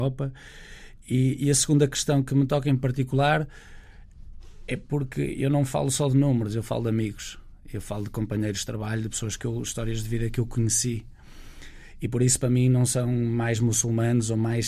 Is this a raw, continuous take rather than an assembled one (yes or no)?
yes